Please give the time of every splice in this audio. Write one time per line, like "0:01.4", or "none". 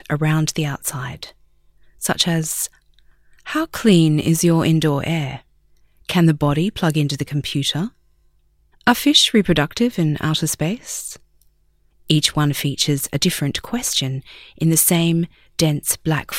0:08.7
0:11.9